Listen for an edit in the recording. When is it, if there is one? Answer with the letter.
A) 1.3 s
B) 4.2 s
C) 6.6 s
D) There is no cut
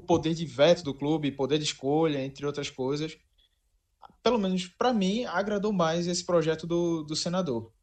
D